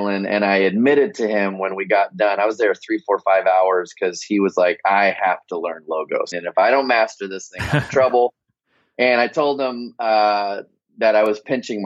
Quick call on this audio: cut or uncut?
cut